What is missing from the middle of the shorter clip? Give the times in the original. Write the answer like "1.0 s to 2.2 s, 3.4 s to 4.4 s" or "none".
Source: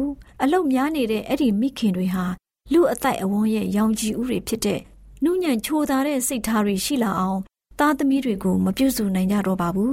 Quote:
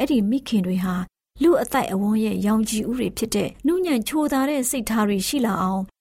4.9 s to 5.2 s